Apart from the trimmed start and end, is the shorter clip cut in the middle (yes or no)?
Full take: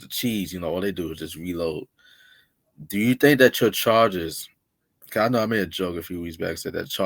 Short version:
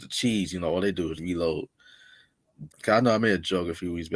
yes